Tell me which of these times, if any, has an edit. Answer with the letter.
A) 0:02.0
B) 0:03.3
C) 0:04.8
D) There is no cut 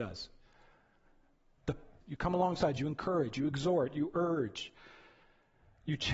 A